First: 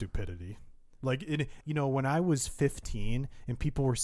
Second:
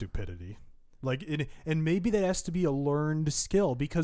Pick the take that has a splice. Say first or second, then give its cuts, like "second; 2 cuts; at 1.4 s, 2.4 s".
first; 1 cut; at 1.6 s